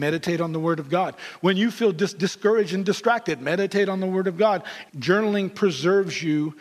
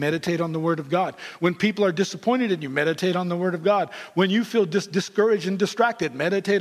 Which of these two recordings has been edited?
first; 2 cuts; at 1.4 s, 4.9 s

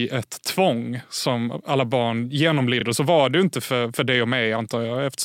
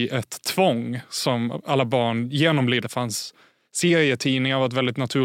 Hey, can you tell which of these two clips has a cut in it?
second; 1 cut; at 2.8 s

